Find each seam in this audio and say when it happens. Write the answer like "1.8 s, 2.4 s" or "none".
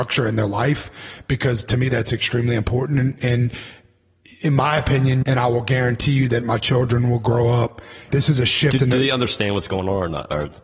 5.2 s, 8.1 s